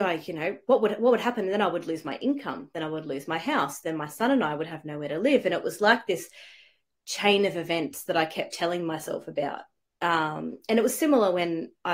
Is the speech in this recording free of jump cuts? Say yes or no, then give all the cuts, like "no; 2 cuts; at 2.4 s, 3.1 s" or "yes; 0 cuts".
yes; 0 cuts